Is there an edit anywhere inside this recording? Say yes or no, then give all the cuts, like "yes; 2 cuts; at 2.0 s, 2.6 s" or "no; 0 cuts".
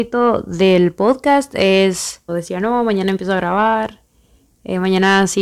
yes; 1 cut; at 2.3 s